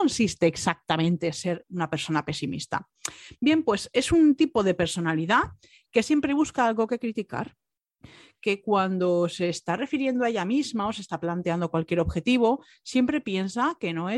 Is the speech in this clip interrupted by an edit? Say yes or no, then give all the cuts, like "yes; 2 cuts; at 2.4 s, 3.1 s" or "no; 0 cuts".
no; 0 cuts